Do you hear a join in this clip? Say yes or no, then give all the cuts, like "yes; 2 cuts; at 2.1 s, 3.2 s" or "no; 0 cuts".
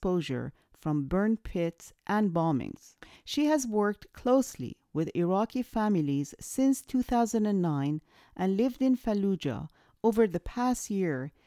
yes; 1 cut; at 3.1 s